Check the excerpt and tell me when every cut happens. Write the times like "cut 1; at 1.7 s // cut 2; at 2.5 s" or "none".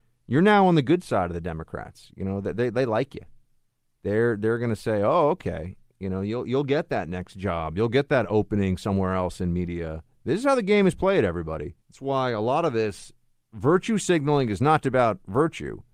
cut 1; at 11.8 s // cut 2; at 14.8 s